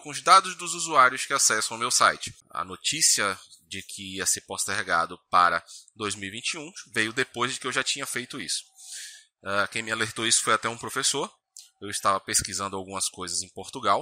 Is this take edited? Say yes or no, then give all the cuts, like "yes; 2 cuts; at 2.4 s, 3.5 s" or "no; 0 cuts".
yes; 1 cut; at 2.4 s